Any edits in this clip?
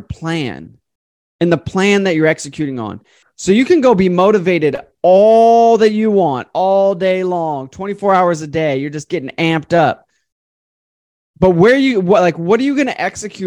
yes; 1 cut; at 3.2 s

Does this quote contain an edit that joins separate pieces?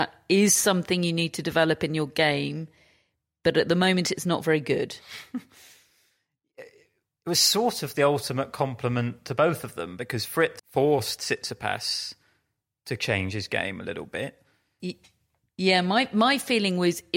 yes; 2 cuts; at 10.6 s, 14.8 s

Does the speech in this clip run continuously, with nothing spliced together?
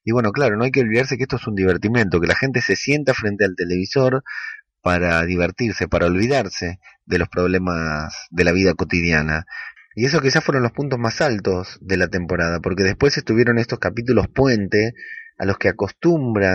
no; 1 cut; at 9.8 s

